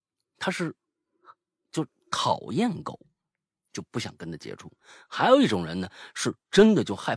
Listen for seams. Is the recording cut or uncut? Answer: uncut